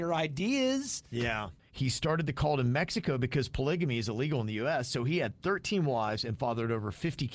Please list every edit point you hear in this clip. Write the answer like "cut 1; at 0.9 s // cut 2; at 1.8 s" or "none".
cut 1; at 1.6 s